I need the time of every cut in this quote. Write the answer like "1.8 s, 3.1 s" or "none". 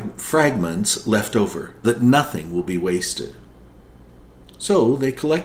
1.8 s